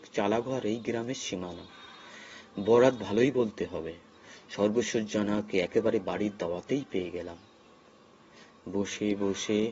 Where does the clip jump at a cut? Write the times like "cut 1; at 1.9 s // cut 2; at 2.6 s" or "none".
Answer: none